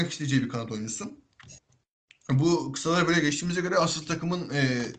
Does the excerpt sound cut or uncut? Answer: uncut